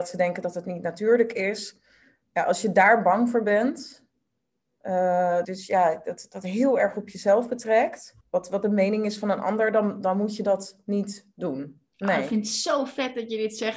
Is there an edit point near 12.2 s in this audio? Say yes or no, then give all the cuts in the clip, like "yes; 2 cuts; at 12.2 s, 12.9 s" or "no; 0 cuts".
no; 2 cuts; at 5.4 s, 8.2 s